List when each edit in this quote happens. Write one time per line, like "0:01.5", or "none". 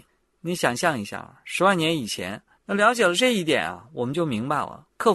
0:02.5